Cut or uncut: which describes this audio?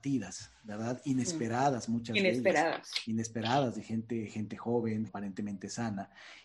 cut